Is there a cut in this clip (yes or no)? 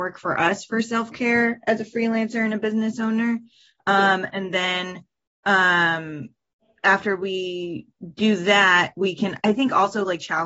no